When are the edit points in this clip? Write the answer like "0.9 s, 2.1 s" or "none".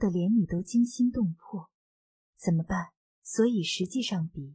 3.1 s